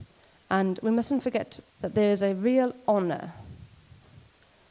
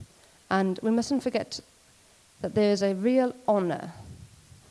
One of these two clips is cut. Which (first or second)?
first